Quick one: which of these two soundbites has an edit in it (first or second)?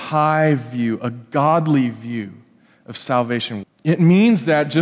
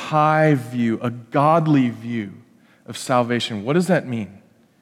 first